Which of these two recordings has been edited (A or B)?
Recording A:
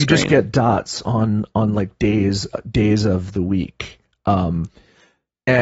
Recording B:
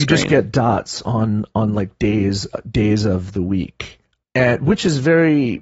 B